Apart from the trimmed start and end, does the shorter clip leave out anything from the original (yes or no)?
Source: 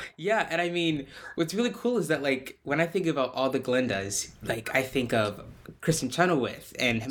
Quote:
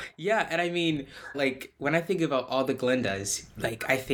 yes